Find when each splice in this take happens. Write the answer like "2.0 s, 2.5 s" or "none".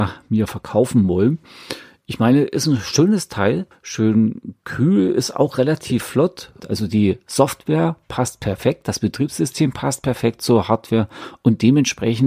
3.7 s, 6.6 s